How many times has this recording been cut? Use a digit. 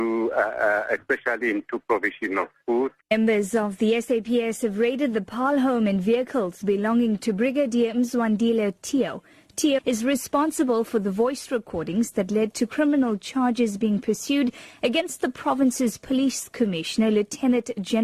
2